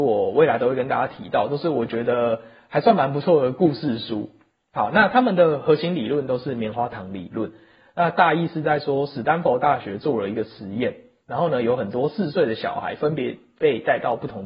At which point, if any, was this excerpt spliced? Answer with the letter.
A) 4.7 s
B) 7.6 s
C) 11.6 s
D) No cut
D